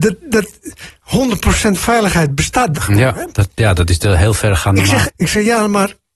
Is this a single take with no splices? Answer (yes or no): no